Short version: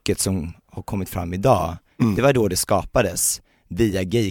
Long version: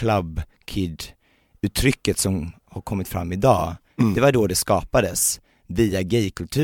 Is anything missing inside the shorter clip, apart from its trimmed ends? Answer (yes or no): no